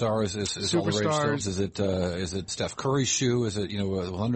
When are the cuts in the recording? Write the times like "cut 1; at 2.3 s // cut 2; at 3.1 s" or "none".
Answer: cut 1; at 1.4 s // cut 2; at 2.5 s